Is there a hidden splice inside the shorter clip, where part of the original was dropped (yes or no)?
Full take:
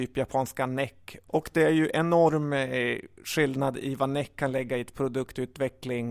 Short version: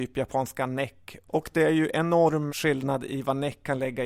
yes